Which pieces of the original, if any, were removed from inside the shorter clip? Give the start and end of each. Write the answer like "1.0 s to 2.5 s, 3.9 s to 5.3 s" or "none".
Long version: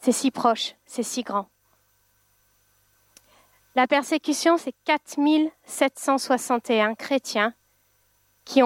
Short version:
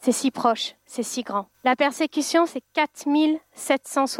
1.5 s to 3.7 s